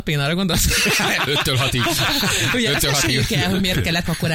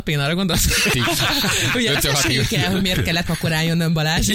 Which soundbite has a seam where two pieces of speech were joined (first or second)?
second